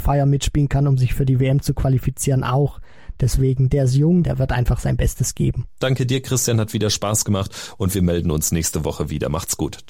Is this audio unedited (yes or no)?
no